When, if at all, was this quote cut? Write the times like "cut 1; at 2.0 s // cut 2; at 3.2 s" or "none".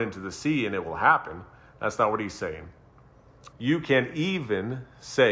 cut 1; at 3.5 s